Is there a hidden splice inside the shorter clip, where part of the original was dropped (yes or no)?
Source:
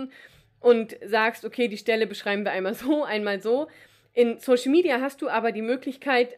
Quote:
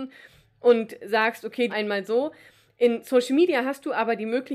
yes